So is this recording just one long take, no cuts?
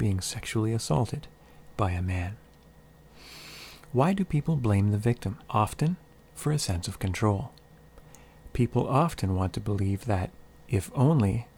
no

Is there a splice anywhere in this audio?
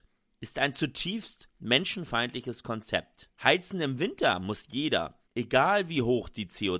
yes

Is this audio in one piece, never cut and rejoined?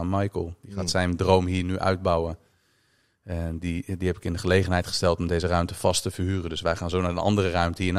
yes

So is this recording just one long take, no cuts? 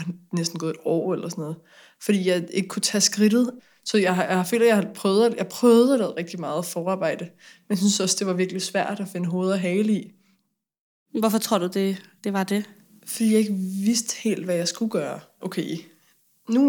yes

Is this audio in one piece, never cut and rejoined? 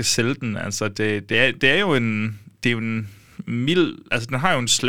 yes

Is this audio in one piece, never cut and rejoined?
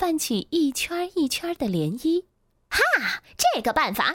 no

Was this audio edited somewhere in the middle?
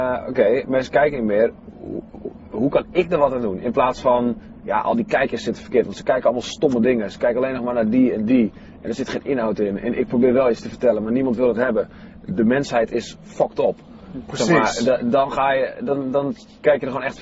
no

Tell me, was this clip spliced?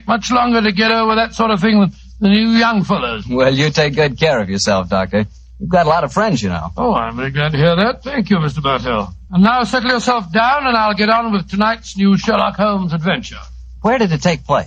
no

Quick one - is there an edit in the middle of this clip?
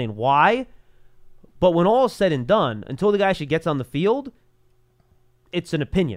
no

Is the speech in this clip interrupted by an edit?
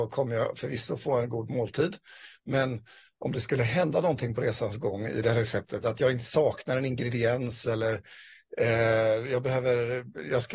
no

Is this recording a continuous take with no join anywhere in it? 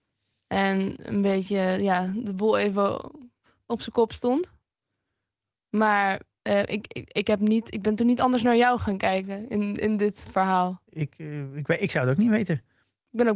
yes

